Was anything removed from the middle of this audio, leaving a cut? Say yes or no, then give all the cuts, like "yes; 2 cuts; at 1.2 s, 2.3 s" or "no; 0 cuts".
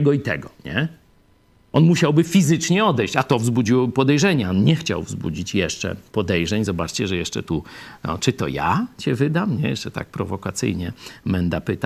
yes; 1 cut; at 6.1 s